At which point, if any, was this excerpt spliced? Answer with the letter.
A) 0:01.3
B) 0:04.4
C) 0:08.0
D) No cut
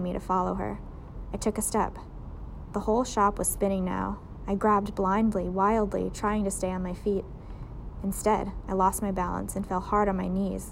D